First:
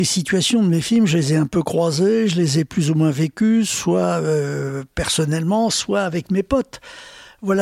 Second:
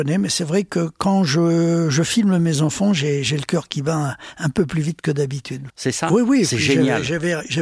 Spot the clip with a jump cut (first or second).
second